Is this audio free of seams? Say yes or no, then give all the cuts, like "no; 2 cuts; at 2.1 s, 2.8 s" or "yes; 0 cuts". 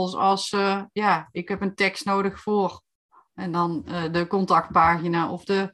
yes; 0 cuts